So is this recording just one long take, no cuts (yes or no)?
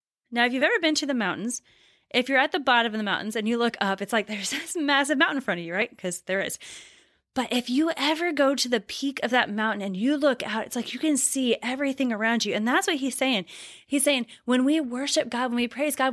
yes